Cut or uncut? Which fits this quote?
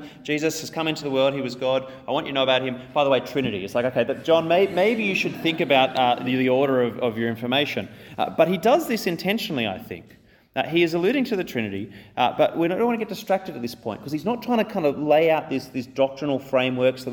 uncut